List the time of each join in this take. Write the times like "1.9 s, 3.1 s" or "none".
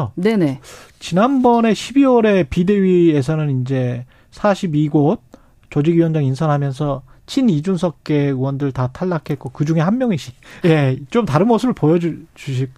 10.6 s